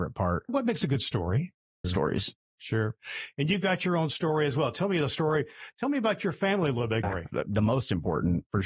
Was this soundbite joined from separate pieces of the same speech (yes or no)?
yes